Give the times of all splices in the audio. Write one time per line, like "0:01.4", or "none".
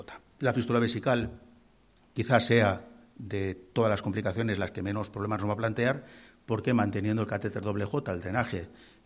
none